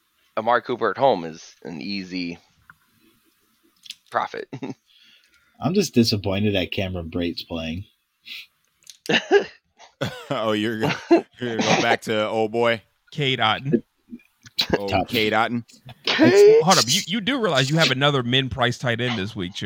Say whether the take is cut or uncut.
uncut